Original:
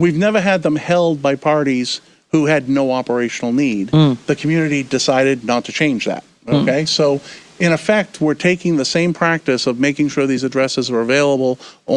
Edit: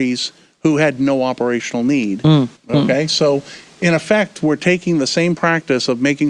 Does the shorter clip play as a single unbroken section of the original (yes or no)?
no